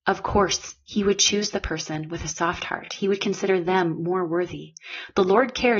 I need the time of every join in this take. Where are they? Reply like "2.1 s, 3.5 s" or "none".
none